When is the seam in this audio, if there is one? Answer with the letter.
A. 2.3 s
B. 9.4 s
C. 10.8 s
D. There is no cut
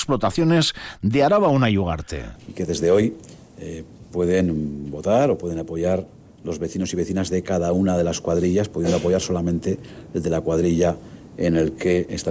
A